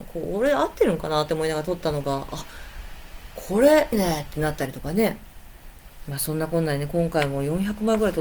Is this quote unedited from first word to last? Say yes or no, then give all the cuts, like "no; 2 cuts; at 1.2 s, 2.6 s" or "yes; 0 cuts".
no; 1 cut; at 3.9 s